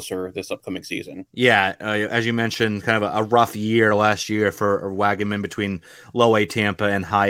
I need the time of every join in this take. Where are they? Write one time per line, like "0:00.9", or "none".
0:01.3